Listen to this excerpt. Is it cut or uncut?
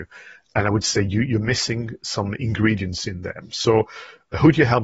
uncut